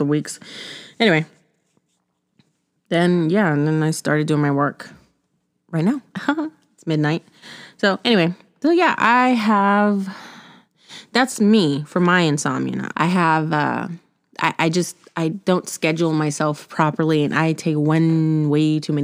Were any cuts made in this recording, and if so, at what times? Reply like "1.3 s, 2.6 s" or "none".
12.9 s